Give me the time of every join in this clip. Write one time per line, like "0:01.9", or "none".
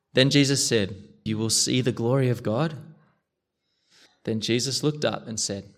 0:01.3
0:04.1